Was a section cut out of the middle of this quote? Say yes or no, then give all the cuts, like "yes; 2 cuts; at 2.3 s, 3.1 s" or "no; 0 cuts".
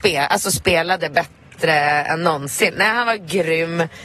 no; 0 cuts